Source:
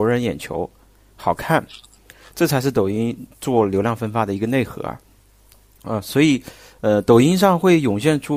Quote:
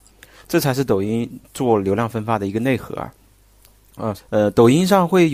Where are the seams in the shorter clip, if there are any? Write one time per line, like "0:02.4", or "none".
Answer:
0:04.2